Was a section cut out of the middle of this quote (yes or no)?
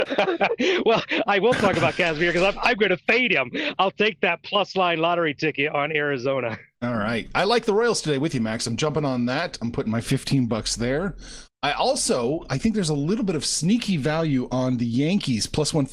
no